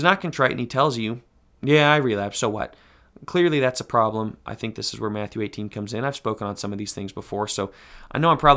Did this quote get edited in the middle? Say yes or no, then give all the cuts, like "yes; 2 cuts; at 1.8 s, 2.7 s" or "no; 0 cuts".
no; 0 cuts